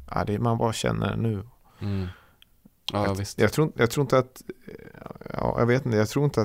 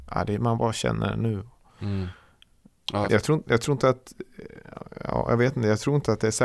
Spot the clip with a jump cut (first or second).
second